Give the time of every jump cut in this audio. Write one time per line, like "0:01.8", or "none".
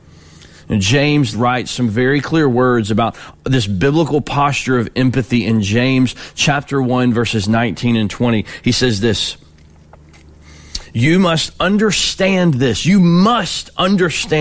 0:01.3